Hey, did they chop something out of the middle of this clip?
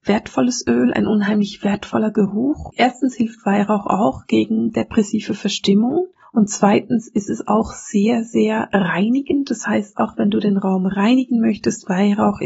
no; 0 cuts

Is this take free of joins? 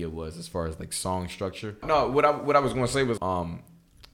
no; 2 cuts; at 1.8 s, 3.2 s

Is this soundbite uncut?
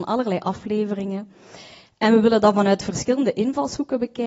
yes; 0 cuts

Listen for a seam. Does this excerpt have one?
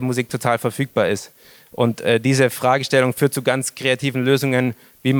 no; 0 cuts

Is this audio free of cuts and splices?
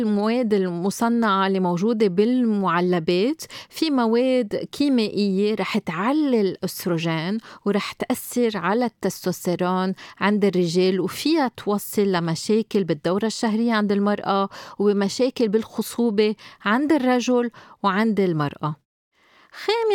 yes; 0 cuts

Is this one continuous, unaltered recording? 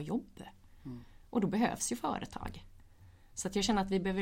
yes; 0 cuts

